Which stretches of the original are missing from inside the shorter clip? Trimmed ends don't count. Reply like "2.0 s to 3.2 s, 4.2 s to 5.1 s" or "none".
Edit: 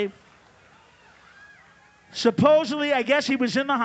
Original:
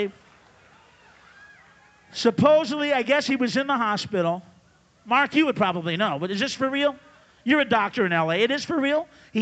none